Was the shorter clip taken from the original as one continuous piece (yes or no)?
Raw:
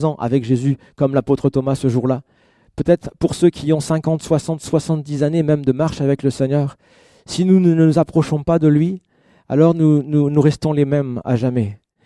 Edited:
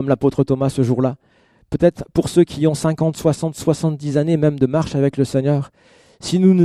yes